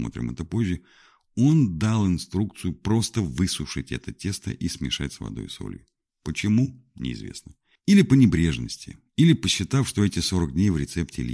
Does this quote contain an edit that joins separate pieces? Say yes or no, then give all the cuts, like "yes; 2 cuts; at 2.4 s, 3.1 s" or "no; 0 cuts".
no; 0 cuts